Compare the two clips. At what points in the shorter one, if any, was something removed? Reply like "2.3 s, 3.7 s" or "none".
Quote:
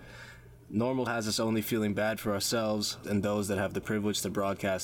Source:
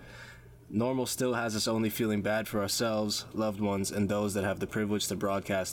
1.1 s, 3.0 s